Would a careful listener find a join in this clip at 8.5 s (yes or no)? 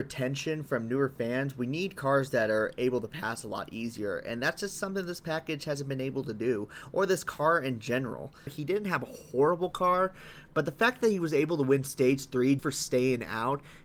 yes